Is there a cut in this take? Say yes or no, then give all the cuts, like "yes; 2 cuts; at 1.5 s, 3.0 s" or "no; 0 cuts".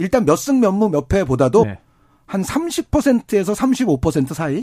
yes; 1 cut; at 1.6 s